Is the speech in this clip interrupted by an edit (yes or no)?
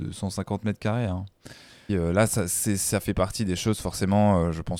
yes